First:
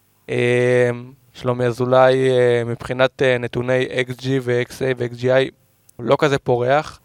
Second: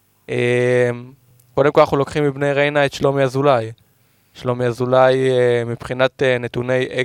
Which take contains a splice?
first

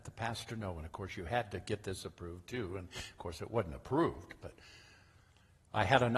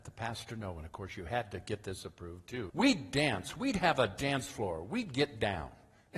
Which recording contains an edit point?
second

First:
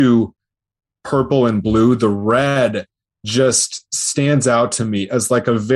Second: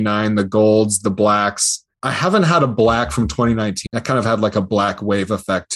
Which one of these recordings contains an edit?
second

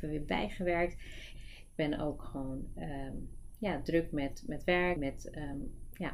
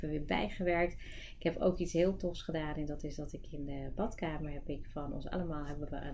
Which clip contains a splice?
first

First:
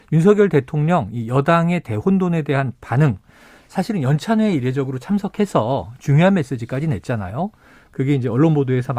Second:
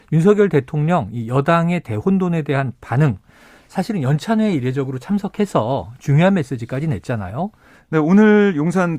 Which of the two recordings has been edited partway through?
second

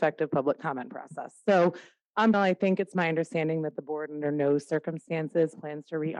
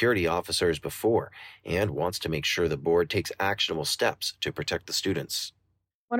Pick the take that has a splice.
first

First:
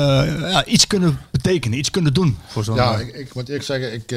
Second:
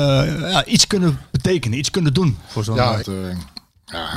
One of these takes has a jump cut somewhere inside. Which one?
second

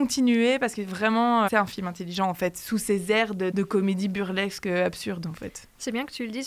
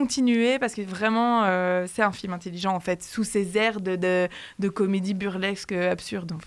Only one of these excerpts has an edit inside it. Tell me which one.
first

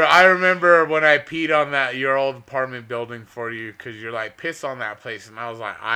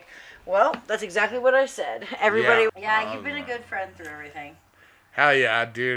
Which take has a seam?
second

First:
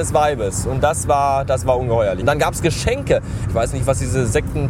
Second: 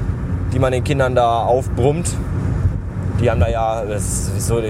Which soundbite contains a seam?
first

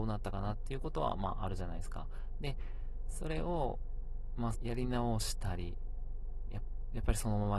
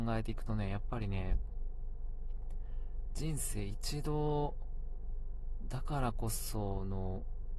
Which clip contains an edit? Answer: first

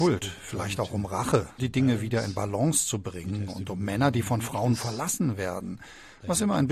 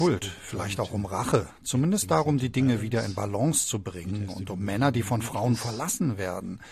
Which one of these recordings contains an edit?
first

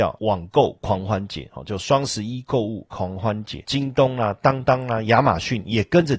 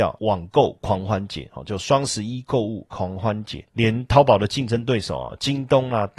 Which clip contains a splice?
first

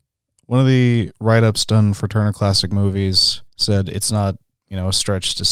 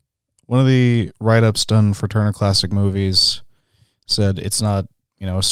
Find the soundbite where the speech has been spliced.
first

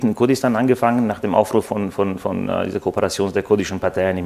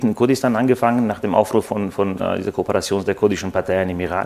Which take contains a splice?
second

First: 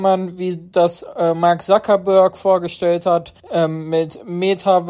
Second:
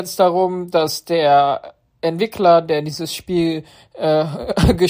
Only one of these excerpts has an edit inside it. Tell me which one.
first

